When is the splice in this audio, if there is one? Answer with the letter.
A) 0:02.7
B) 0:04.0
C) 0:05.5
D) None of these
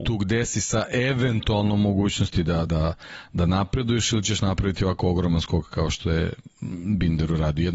D